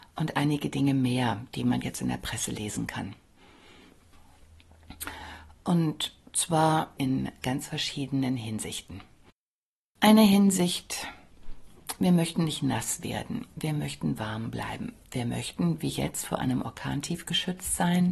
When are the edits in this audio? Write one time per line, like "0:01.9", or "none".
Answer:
0:05.5